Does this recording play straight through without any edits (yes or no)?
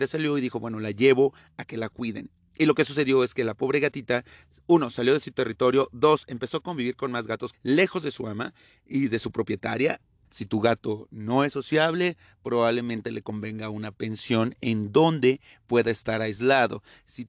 no